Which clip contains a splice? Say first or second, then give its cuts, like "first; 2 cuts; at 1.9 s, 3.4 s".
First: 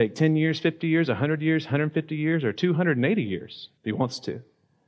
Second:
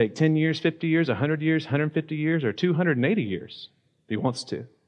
first; 1 cut; at 3.8 s